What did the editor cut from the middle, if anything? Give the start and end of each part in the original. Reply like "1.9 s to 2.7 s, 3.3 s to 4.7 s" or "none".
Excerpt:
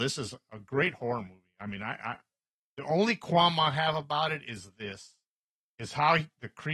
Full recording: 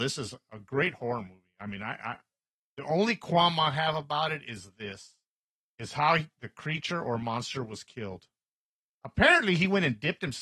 none